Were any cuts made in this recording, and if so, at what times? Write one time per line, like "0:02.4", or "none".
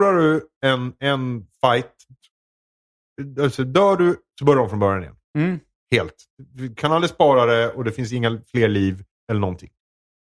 none